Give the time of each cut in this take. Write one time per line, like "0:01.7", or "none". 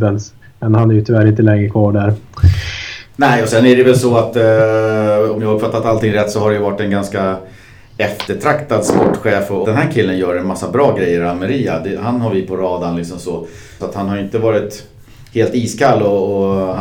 0:09.6
0:13.8